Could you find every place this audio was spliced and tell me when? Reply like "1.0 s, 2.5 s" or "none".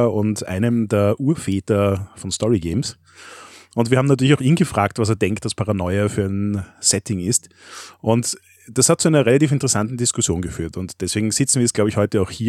none